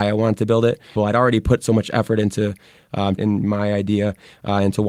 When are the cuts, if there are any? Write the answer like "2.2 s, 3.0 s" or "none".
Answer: 1.0 s, 3.2 s